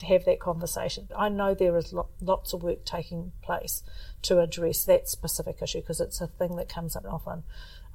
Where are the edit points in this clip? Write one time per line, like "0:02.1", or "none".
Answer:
0:01.1
0:07.0